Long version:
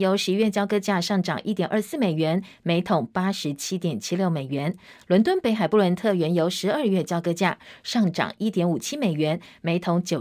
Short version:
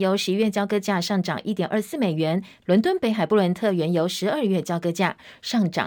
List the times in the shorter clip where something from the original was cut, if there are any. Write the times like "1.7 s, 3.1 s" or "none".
2.6 s